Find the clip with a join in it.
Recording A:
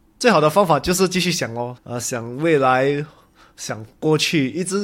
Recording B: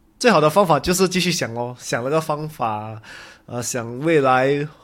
A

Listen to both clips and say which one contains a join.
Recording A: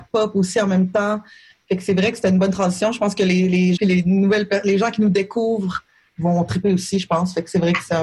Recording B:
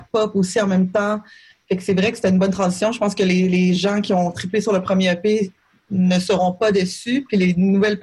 A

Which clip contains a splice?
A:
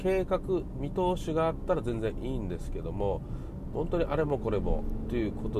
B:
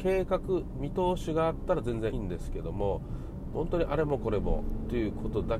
B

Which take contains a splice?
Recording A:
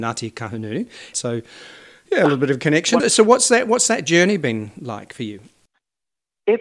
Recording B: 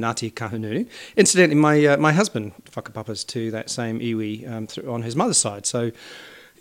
A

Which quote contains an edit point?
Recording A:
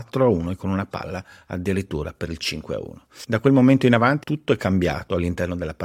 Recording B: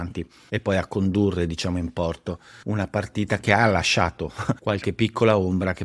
A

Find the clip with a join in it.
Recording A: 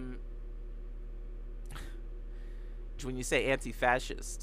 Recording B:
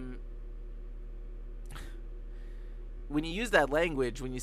A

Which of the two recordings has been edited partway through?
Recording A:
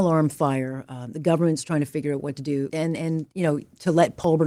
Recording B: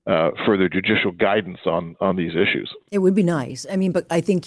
A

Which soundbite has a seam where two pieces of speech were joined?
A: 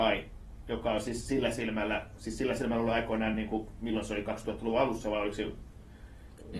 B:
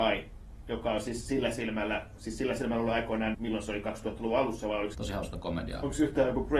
B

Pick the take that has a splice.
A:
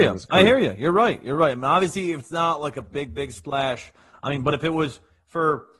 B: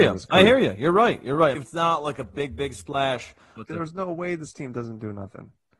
B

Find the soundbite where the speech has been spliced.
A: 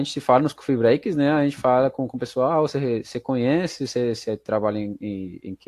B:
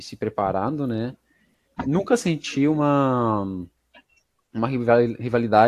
B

